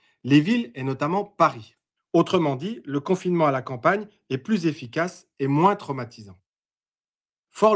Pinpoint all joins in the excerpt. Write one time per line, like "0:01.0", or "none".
0:02.0